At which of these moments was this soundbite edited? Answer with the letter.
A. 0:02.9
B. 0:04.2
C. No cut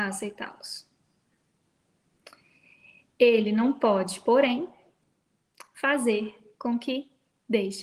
C